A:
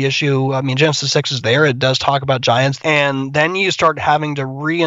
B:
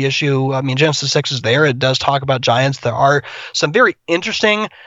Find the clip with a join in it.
A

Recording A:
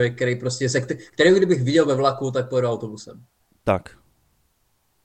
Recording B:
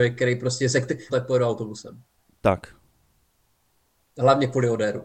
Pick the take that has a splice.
B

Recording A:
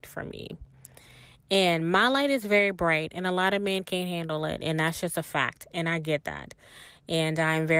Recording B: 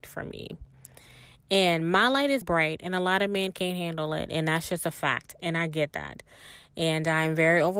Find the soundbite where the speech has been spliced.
B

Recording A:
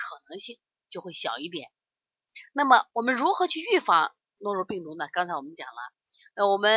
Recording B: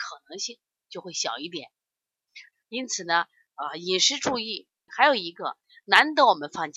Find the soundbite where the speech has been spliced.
B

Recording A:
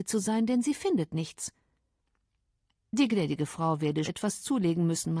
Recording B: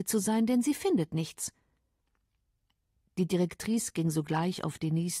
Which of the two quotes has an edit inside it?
A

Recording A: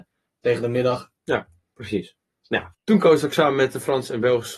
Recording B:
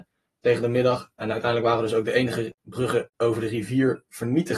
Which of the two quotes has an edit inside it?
A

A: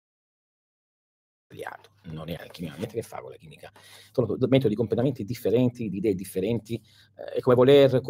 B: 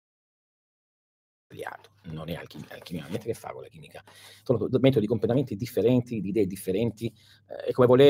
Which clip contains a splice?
A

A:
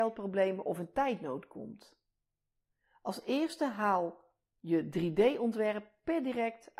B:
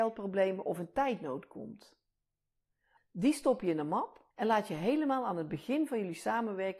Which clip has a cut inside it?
B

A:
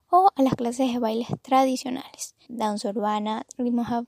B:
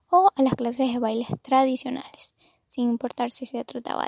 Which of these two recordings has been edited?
A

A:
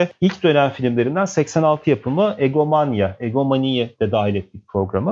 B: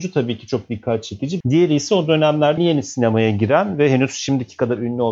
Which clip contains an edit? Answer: B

